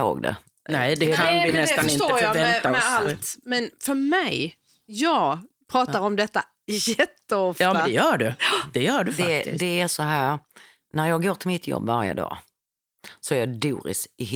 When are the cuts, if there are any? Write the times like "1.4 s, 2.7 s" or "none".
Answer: none